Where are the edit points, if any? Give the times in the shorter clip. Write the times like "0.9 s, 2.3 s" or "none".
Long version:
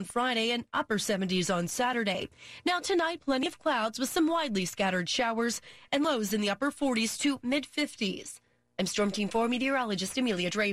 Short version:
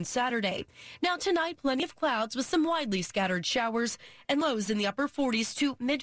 none